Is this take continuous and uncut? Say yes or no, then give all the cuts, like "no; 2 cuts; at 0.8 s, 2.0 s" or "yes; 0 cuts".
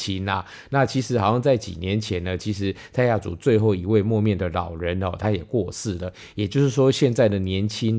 yes; 0 cuts